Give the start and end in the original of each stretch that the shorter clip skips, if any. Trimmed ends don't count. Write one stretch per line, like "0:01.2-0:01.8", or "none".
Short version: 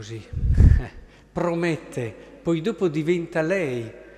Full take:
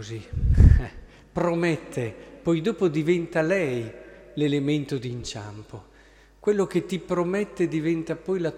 none